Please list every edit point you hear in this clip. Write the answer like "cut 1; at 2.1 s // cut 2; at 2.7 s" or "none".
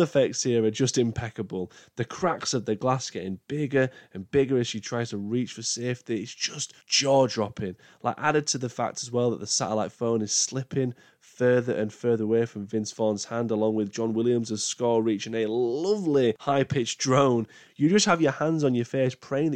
cut 1; at 6.8 s